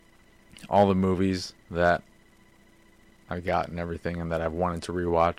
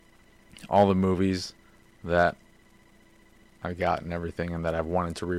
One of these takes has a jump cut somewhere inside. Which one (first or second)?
first